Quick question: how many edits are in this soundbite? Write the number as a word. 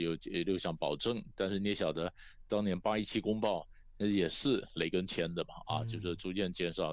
zero